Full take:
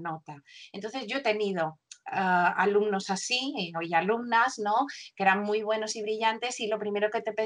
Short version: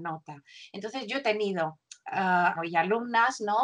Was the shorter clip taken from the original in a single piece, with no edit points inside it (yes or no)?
no